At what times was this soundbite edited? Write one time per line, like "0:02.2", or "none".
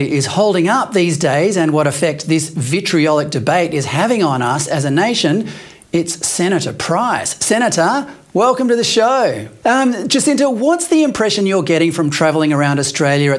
0:09.6